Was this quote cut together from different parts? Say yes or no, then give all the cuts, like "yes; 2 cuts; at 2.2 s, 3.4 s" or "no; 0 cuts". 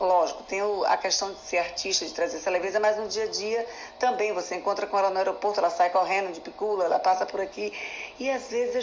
no; 0 cuts